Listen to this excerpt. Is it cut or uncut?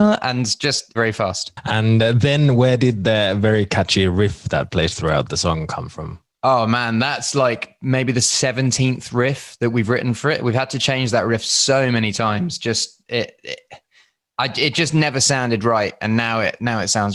cut